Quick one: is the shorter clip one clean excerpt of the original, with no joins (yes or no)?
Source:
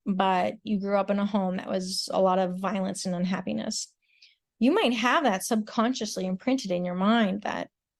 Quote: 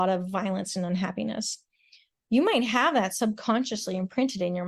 yes